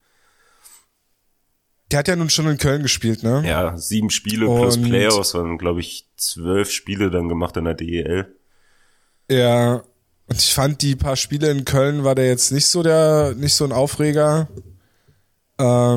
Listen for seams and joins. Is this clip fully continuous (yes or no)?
yes